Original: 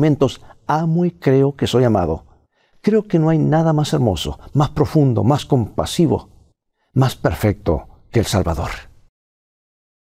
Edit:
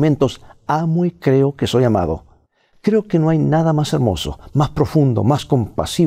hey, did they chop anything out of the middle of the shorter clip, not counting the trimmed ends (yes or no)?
no